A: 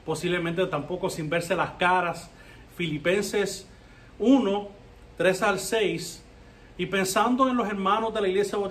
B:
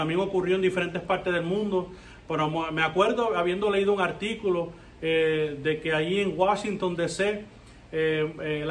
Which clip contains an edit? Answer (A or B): A